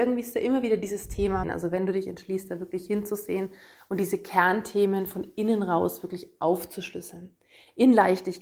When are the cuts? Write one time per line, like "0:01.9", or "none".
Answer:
0:01.4